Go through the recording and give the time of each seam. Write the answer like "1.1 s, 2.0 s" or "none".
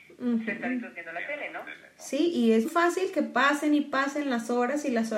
2.6 s